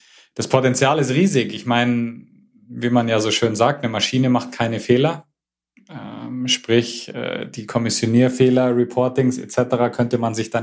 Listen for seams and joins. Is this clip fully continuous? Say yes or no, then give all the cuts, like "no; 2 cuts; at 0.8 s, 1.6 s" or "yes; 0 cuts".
yes; 0 cuts